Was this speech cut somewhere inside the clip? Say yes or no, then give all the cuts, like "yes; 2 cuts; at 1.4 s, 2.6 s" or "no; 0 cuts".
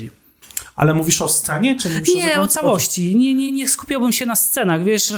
yes; 1 cut; at 3.5 s